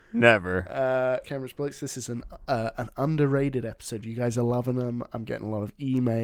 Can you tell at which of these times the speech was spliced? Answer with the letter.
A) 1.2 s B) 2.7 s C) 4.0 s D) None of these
A